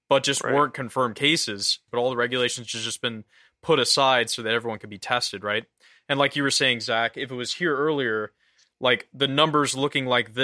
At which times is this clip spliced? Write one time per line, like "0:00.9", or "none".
0:01.9